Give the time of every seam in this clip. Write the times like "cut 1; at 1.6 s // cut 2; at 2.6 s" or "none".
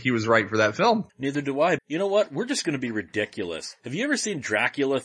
cut 1; at 1.8 s